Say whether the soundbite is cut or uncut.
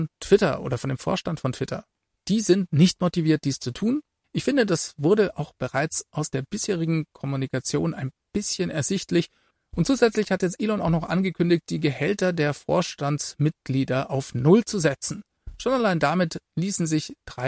uncut